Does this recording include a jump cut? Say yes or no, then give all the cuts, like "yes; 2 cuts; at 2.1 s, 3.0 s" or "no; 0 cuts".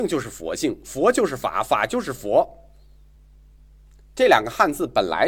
no; 0 cuts